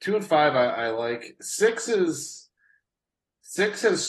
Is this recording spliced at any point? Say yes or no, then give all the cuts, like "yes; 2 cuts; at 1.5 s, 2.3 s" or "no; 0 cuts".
no; 0 cuts